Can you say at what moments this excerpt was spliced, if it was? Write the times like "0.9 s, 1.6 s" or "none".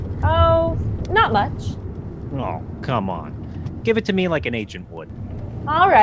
2.8 s, 3.8 s